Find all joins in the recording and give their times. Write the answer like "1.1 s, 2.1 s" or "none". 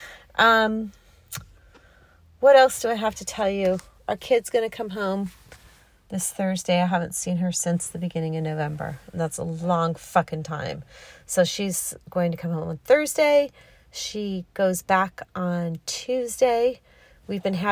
none